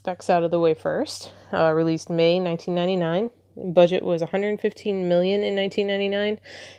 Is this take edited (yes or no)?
no